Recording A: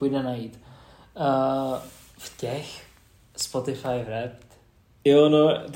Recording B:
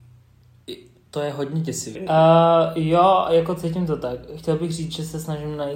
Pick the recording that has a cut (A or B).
B